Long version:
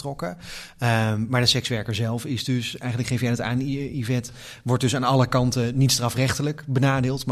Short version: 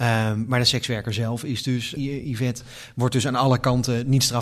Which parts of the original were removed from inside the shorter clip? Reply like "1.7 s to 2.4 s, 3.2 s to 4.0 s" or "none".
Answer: 2.8 s to 3.7 s